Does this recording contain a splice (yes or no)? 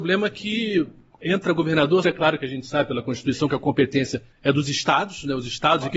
yes